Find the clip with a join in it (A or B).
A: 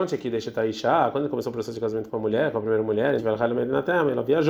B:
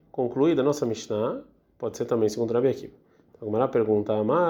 A